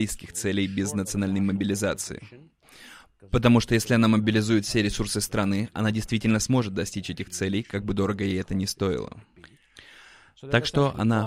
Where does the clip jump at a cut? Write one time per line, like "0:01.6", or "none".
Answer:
none